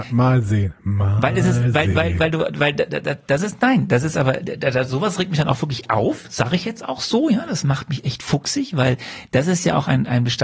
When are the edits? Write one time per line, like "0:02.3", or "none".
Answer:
none